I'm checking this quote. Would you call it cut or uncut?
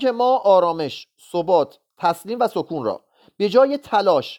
uncut